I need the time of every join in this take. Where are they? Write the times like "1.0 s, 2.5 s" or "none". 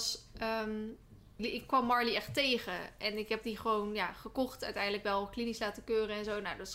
1.4 s